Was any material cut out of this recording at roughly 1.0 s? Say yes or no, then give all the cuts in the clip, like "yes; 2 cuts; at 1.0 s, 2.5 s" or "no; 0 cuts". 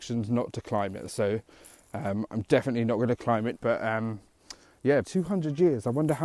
no; 2 cuts; at 3.5 s, 5.0 s